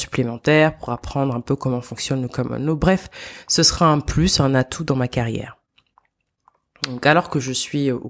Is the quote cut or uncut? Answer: uncut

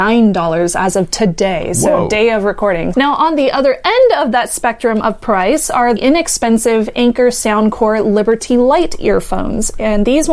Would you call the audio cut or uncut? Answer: cut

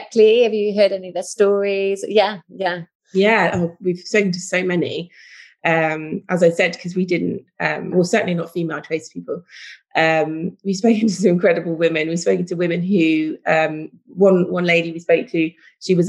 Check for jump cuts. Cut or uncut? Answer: cut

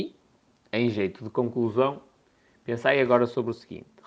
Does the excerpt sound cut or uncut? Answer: uncut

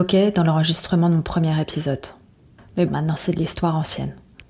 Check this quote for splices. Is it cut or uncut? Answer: cut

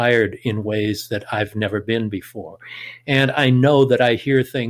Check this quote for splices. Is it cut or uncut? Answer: uncut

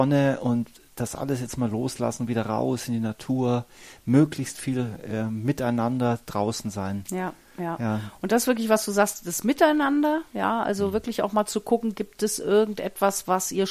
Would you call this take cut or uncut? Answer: uncut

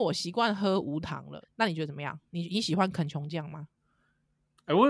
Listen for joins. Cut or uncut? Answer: cut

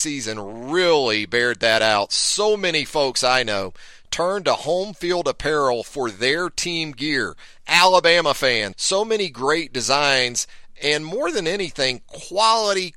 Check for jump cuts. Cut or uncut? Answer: cut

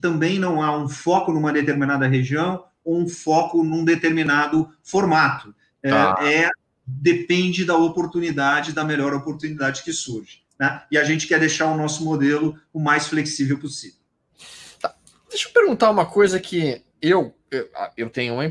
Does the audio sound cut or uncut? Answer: uncut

